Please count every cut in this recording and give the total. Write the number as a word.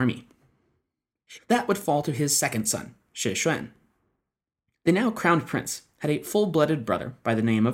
one